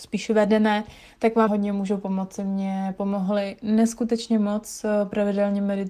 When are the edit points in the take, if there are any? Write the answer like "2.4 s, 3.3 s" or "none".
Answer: 1.5 s